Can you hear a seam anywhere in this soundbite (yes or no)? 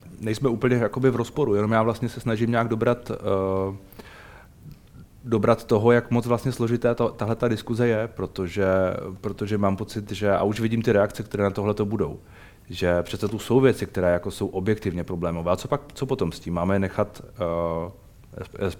no